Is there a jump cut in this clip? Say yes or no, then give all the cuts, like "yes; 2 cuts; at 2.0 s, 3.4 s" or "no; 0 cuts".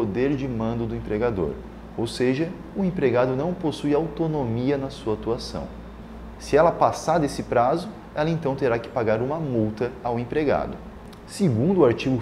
yes; 2 cuts; at 6.3 s, 11.2 s